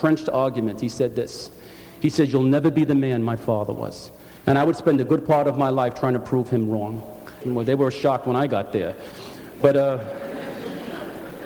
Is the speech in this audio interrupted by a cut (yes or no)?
yes